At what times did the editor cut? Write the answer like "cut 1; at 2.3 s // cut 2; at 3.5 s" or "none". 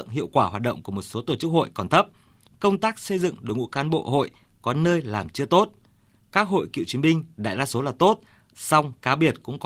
none